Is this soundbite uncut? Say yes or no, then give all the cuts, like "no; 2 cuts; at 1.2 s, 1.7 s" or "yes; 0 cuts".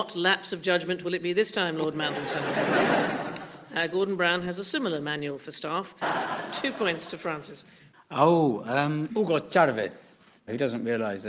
no; 2 cuts; at 6.0 s, 7.9 s